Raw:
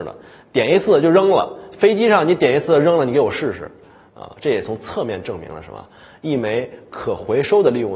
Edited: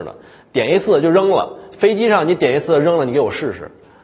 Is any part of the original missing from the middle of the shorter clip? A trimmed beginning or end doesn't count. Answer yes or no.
no